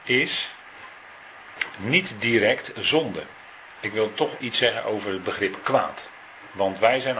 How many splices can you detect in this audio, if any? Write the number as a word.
one